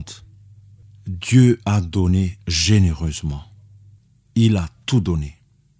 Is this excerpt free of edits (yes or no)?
yes